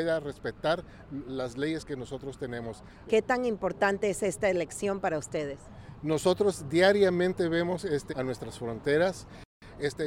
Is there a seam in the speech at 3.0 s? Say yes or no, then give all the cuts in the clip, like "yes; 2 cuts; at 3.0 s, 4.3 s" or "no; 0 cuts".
yes; 2 cuts; at 3.0 s, 8.1 s